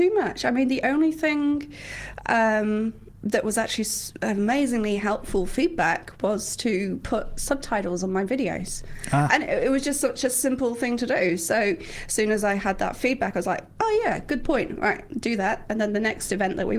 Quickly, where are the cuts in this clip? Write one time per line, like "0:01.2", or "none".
none